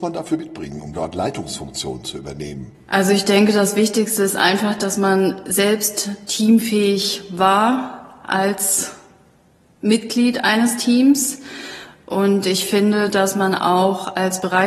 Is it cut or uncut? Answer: uncut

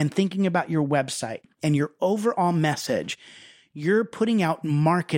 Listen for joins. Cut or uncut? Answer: uncut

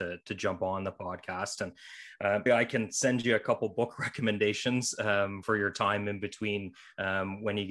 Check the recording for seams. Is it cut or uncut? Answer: cut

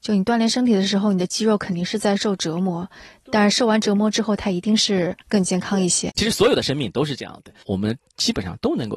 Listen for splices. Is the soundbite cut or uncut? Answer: cut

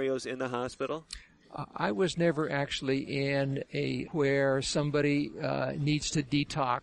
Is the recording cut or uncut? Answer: cut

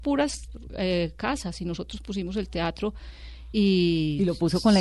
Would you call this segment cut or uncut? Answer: uncut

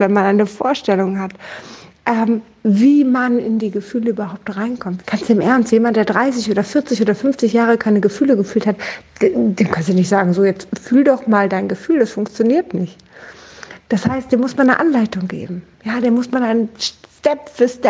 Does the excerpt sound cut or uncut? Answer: cut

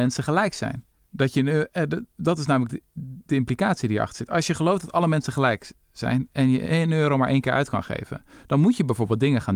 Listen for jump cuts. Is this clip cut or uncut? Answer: uncut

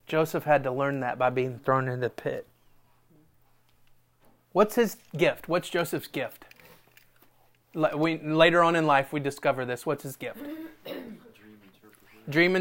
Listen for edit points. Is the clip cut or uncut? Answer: uncut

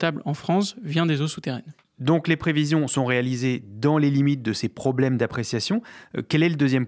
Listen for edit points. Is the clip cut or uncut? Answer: uncut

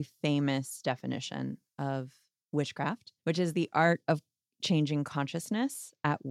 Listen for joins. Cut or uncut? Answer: cut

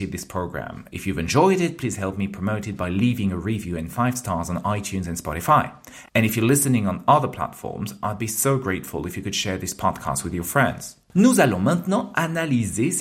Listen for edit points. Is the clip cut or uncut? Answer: uncut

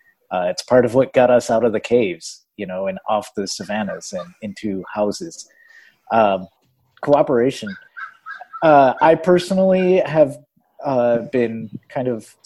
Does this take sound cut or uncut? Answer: uncut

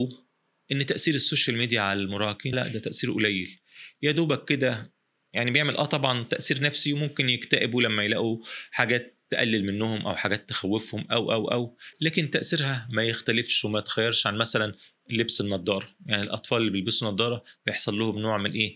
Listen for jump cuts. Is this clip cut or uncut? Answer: cut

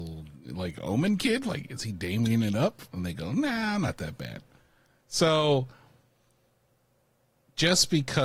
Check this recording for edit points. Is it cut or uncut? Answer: uncut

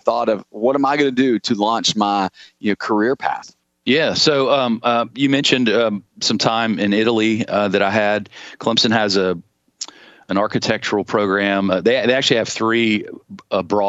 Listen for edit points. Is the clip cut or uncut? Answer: uncut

